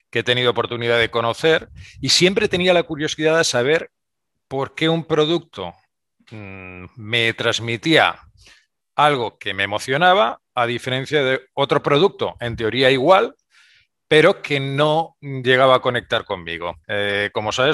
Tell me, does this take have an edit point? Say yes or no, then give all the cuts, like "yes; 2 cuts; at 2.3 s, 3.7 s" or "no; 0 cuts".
yes; 1 cut; at 16.8 s